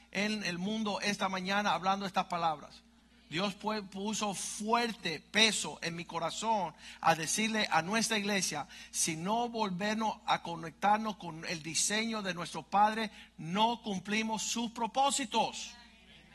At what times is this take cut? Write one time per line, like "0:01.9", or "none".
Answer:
none